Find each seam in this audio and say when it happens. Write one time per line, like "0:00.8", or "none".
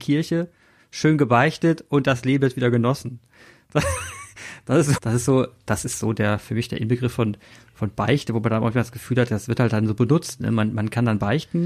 0:05.0